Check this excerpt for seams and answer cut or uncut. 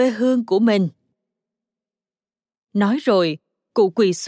uncut